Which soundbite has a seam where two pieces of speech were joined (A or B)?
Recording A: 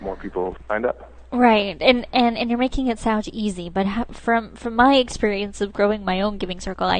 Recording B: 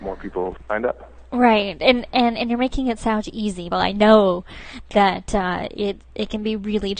B